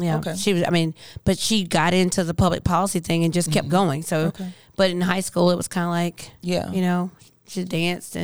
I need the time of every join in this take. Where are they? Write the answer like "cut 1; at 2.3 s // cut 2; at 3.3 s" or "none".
none